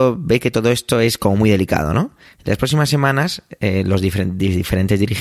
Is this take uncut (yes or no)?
yes